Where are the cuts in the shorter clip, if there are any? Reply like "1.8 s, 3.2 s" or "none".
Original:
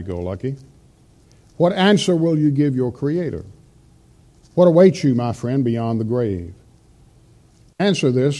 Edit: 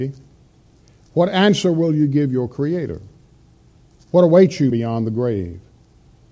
4.7 s